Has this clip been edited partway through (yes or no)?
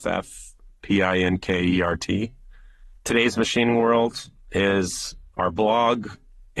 no